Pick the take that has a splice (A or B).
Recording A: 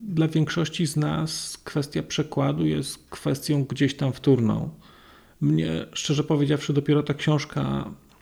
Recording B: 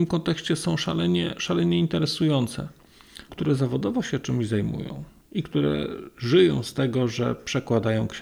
B